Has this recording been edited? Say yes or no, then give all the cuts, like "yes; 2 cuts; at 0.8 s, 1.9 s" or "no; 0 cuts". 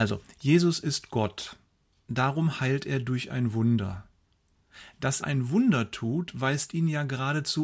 yes; 1 cut; at 5.2 s